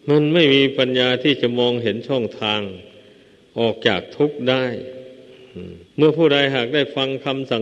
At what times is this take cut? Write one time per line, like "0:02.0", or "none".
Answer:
0:05.9